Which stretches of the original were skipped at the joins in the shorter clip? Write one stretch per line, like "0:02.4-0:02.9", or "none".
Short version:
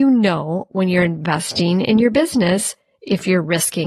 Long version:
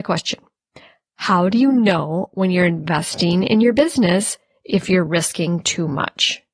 none